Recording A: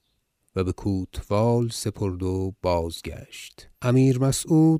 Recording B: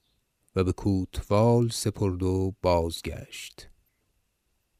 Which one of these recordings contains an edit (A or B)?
A